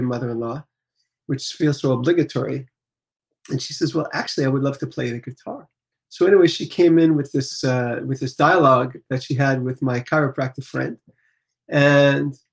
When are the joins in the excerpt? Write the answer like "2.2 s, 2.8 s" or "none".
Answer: 5.9 s

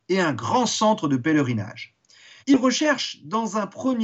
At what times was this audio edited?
2.4 s

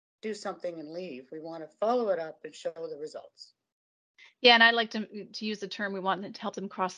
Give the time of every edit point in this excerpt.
none

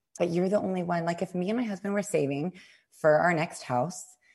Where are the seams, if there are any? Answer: none

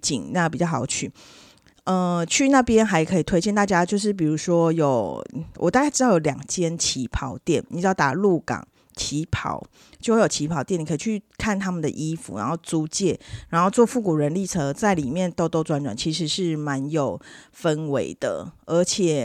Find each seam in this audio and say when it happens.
none

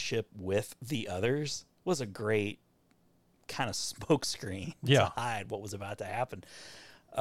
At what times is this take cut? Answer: none

